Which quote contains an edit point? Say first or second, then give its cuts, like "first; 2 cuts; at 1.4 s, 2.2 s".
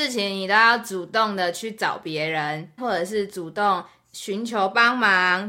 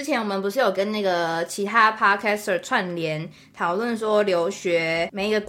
first; 1 cut; at 2.8 s